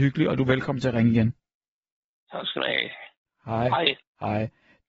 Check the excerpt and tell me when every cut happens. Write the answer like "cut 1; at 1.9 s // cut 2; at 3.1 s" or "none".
none